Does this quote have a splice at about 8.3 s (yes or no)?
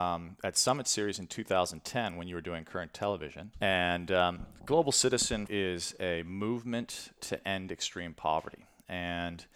no